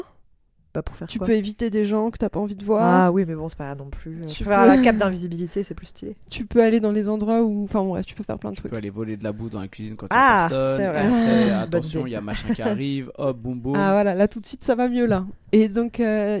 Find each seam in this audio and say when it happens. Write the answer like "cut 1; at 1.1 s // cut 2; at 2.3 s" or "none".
none